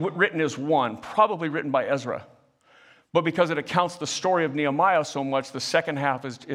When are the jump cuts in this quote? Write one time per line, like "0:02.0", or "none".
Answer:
none